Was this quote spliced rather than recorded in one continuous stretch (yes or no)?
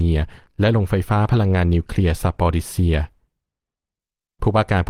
no